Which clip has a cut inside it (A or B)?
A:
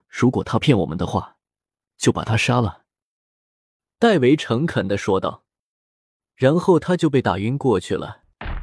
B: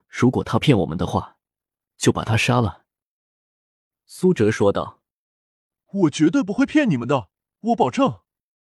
A